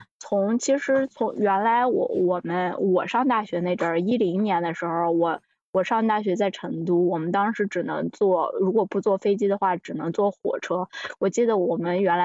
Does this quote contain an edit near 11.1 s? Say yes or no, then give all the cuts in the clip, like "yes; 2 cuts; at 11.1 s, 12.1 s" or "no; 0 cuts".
no; 0 cuts